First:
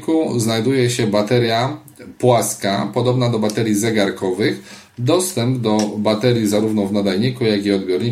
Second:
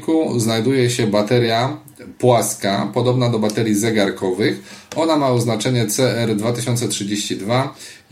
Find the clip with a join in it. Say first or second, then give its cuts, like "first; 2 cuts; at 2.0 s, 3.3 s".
first; 1 cut; at 4.9 s